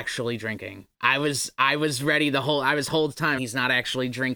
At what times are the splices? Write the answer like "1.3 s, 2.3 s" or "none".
0.9 s, 3.4 s